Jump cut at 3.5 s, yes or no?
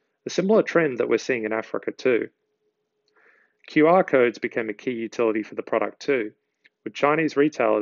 yes